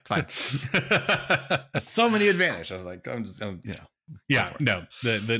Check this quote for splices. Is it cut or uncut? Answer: uncut